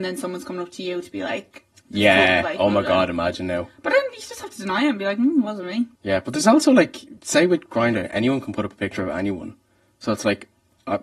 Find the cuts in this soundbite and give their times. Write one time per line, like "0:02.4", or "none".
0:06.0
0:07.2